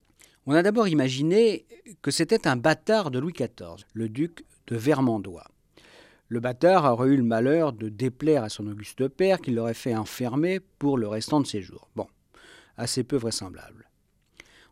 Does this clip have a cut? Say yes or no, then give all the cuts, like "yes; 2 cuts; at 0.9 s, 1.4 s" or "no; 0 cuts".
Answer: yes; 1 cut; at 3.8 s